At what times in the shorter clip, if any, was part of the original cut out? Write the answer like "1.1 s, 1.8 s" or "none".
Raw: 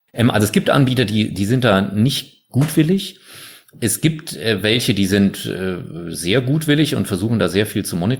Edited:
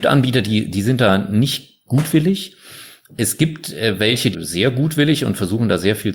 4.3 s